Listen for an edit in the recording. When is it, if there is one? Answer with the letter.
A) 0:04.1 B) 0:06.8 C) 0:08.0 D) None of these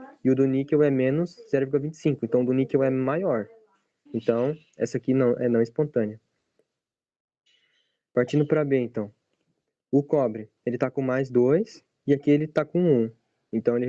A